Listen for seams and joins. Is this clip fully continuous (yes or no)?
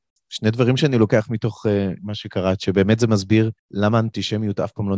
no